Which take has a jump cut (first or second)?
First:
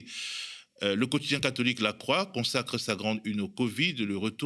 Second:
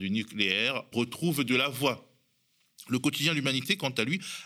second